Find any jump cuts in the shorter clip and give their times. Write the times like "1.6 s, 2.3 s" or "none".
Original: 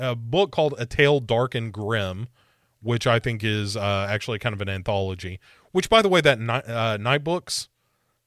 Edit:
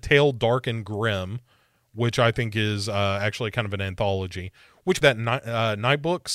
5.0 s